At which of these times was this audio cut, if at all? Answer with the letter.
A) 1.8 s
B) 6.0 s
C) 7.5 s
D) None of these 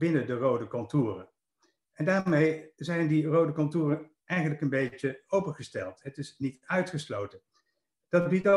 D